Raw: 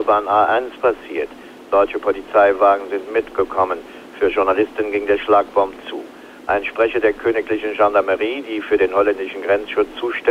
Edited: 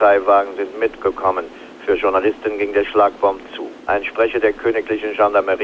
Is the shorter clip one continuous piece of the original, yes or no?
no